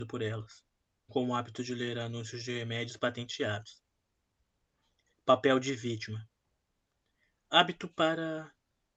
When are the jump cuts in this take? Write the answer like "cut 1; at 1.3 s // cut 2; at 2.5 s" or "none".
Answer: cut 1; at 1.1 s